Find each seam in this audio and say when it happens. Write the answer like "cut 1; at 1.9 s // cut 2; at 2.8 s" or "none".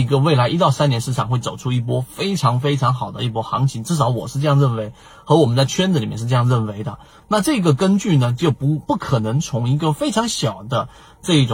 none